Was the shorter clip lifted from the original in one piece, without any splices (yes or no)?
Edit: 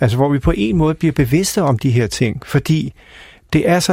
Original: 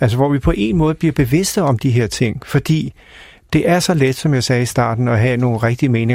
yes